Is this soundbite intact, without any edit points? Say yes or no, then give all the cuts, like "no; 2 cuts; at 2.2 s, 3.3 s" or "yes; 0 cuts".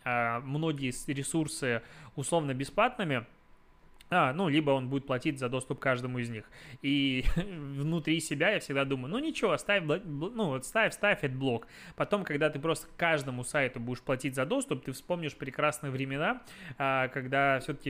yes; 0 cuts